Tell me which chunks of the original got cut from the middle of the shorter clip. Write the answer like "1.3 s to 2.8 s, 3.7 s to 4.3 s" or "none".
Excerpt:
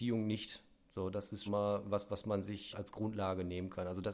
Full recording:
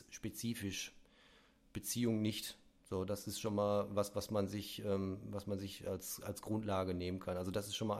3.4 s to 3.5 s, 4.8 s to 6.2 s